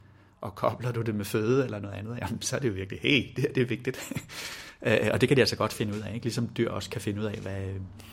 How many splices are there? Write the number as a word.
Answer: zero